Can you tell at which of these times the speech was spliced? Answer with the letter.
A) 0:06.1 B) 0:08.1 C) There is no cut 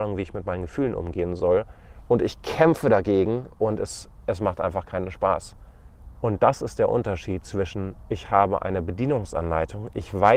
A